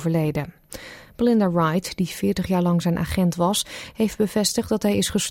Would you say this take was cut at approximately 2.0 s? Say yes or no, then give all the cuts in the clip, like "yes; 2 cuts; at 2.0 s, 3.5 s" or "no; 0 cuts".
no; 0 cuts